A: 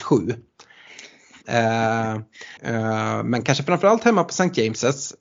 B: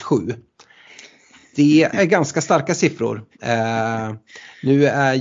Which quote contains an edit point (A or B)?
A